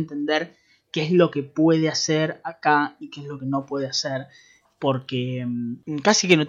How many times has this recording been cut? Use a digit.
1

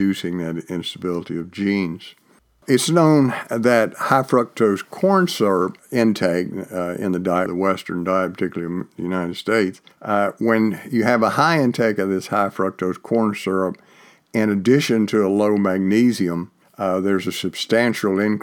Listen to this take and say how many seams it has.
1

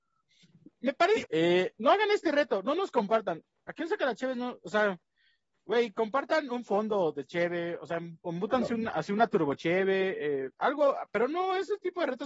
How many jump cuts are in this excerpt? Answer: 1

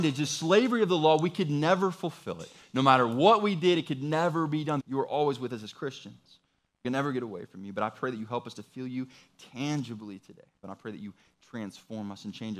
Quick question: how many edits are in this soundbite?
2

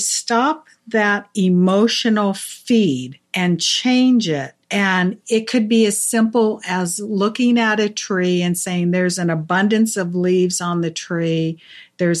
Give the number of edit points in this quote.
2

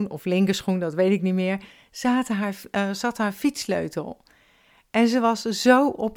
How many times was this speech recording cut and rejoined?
0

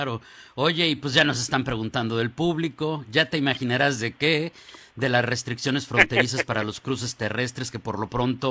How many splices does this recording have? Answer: 0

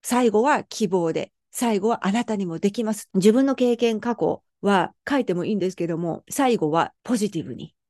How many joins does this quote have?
1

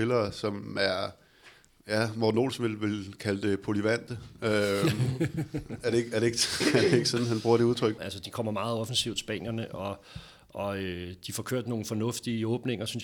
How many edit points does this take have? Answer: 1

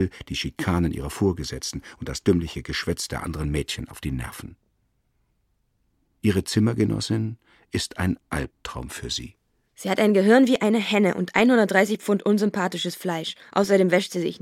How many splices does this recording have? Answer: 0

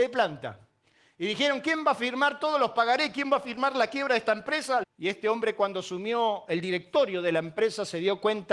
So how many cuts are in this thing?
1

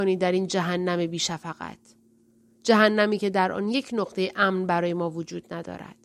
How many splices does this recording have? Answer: 0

